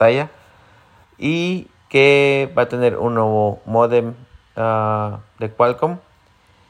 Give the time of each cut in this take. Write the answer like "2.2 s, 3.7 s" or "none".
1.0 s